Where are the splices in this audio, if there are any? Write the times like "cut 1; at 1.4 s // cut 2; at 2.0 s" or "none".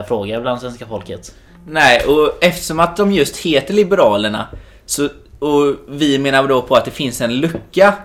none